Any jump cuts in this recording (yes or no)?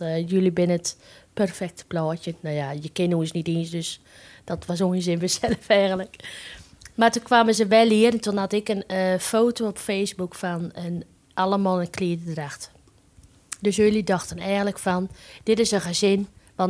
no